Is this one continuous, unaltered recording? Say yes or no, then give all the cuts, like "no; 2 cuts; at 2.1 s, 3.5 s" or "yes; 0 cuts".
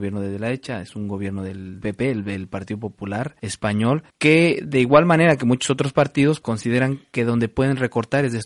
no; 1 cut; at 6.4 s